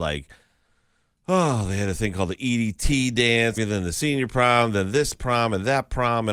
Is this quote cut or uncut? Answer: cut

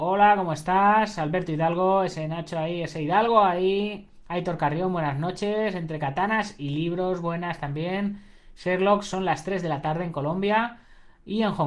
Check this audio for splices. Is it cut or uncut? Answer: uncut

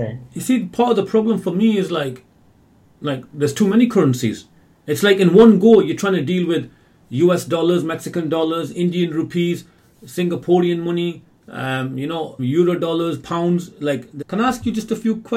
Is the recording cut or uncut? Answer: cut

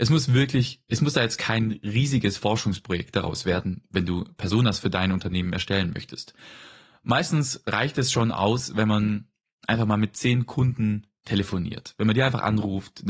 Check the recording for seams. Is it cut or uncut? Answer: uncut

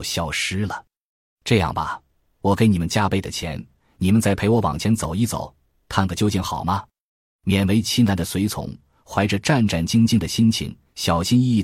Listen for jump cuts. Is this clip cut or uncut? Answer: uncut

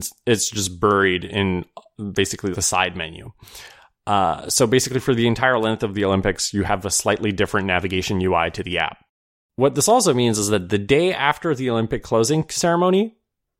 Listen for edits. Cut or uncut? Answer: cut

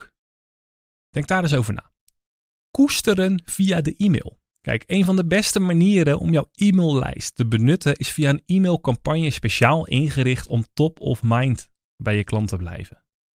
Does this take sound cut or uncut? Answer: cut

